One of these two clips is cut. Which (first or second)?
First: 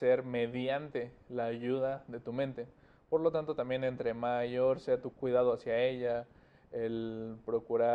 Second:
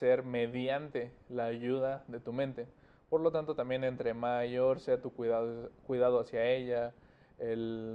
first